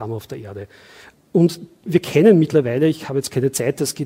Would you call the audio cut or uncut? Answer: uncut